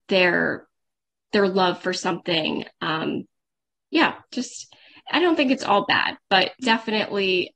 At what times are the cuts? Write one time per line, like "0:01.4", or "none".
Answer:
none

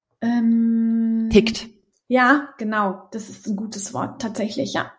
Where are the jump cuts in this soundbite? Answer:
none

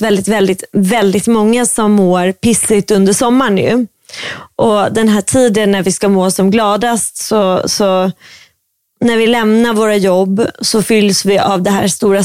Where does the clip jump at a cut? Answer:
none

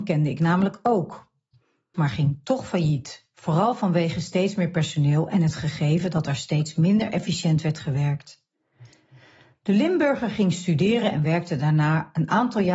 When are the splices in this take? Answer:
0:01.9

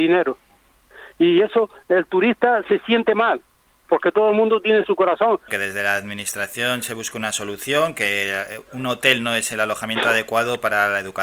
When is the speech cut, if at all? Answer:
0:05.5

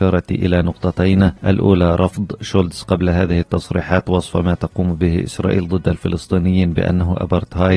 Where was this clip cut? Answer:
0:01.4

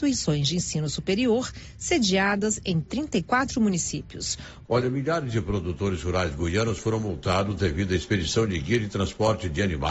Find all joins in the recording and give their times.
0:04.6

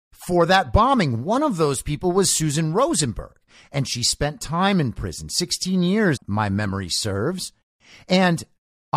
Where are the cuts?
0:06.2

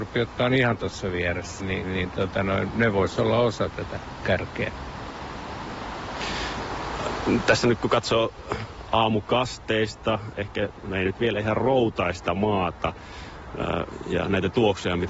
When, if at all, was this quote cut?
0:01.6

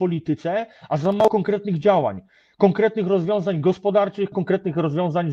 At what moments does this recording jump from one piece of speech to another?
0:04.3

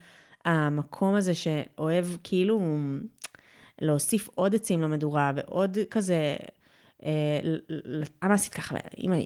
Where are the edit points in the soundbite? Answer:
0:08.2

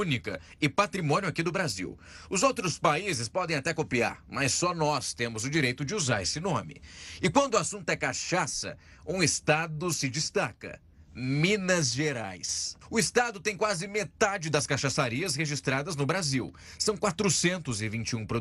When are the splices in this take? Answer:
none

